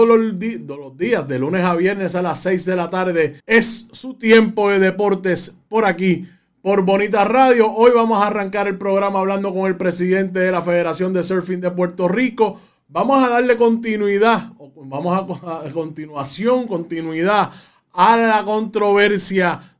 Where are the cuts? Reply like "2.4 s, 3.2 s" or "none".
3.4 s

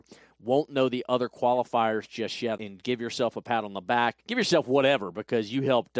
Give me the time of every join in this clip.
2.6 s, 4.2 s

